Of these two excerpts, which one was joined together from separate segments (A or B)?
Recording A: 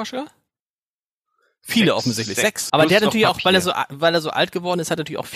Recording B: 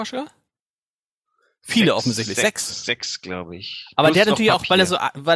A